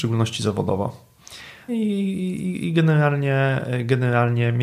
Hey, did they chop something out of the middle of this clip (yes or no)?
yes